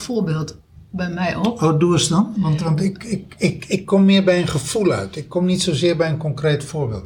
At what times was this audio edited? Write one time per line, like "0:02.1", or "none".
none

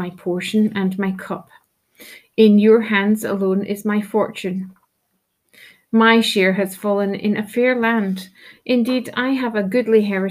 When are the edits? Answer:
none

